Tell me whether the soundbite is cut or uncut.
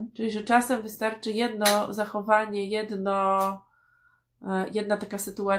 uncut